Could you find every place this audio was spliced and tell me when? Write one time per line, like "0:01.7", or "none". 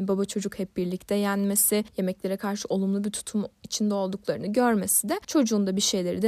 0:01.9